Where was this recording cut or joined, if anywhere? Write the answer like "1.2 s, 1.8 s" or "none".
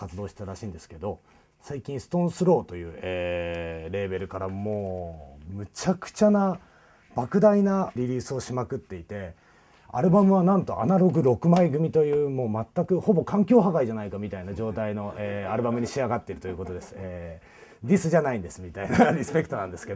8.0 s